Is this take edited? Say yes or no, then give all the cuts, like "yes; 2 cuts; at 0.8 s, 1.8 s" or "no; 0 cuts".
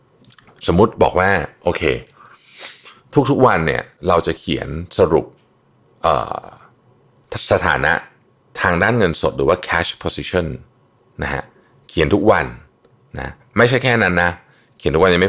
no; 0 cuts